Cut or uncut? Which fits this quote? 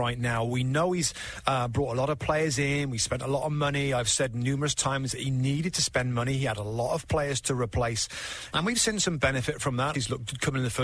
cut